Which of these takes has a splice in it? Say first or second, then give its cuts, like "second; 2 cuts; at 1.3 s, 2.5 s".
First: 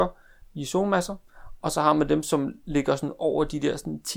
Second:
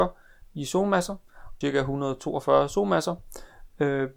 second; 1 cut; at 1.6 s